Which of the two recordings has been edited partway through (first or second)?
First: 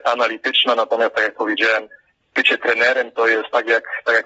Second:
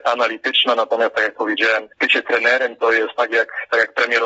second